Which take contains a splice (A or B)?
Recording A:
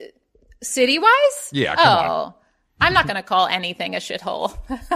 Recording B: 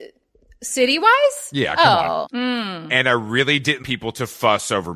B